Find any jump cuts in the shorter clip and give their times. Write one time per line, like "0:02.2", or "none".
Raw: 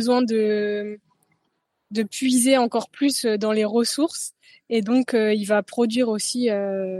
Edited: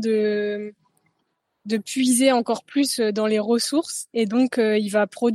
0:04.1